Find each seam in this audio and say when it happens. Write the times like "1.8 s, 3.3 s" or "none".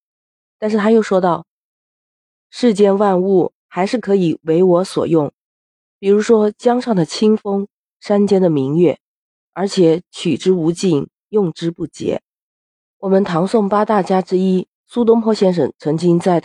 12.9 s, 14.8 s